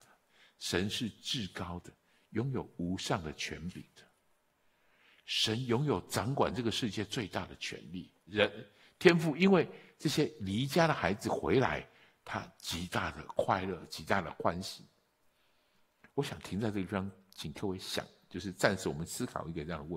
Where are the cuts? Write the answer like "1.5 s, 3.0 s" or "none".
8.3 s